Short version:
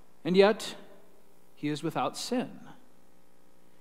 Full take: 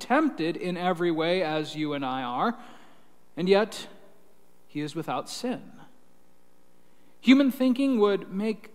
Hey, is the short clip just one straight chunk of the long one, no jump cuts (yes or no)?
yes